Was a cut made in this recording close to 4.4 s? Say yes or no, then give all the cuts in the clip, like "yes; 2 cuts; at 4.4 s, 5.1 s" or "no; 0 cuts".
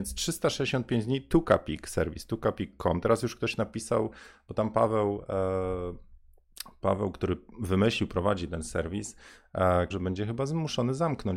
no; 2 cuts; at 7.5 s, 9.9 s